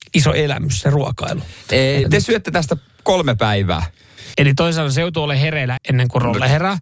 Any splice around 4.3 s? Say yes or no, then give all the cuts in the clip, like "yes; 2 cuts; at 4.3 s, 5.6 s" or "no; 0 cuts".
yes; 3 cuts; at 2.0 s, 4.3 s, 5.8 s